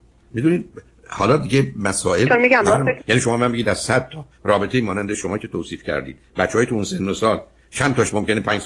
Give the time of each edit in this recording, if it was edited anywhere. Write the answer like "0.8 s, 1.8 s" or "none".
3.0 s